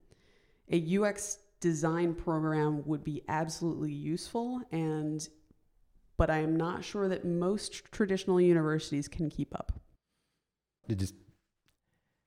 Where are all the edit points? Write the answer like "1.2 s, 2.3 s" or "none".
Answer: 10.8 s

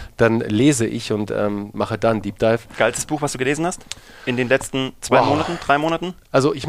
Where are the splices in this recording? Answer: none

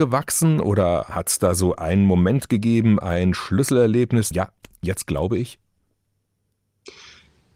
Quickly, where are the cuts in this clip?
4.3 s

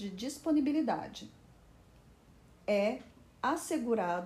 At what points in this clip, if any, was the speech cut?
2.5 s

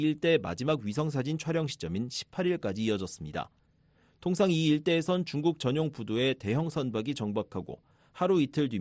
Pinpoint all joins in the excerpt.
none

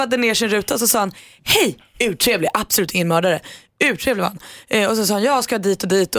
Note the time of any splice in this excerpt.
none

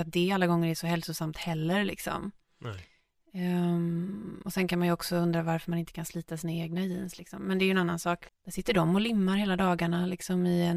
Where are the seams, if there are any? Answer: 8.3 s

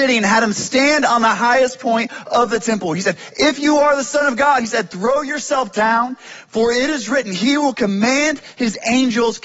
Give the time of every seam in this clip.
none

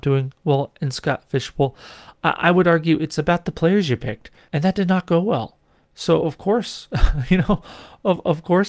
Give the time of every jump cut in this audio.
4.5 s

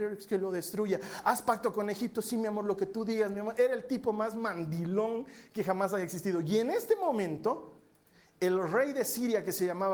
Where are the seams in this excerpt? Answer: none

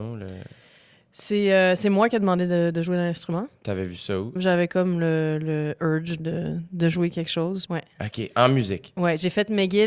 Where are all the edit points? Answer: 4.4 s, 6.2 s, 7.7 s

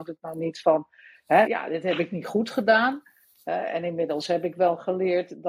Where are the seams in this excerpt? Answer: 1.4 s

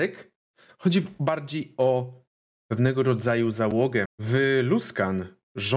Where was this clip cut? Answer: 4.1 s

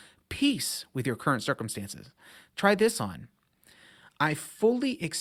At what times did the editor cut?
none

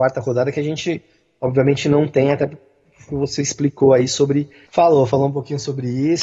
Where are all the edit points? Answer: 4.7 s

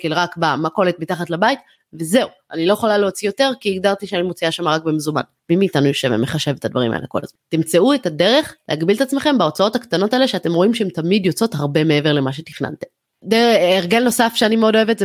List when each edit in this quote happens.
5.4 s

